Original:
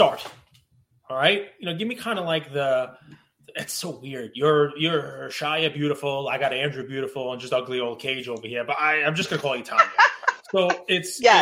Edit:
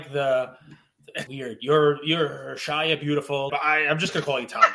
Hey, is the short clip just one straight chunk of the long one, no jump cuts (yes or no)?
no